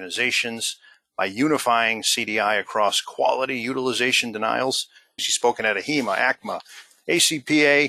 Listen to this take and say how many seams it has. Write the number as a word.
one